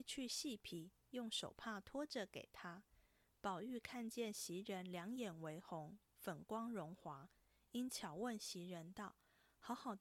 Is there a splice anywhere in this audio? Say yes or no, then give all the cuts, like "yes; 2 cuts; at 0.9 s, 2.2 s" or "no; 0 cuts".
no; 0 cuts